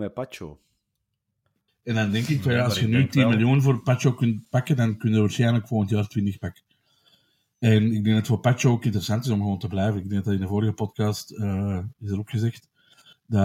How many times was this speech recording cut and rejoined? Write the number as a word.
one